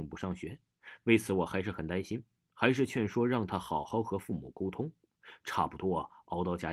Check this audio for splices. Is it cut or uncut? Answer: uncut